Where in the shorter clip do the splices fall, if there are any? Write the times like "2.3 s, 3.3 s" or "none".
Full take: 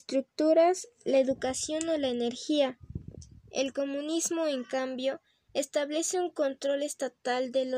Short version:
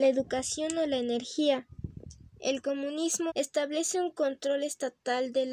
3.3 s